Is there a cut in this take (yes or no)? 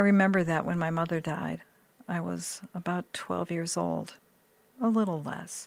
no